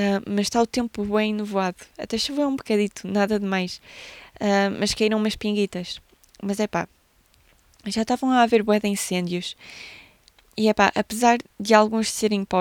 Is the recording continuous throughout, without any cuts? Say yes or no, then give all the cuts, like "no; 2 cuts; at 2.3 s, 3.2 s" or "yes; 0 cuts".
yes; 0 cuts